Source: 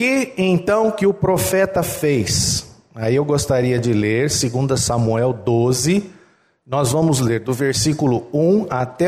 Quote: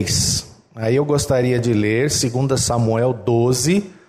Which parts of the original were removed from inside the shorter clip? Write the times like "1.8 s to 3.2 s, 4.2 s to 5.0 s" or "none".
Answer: none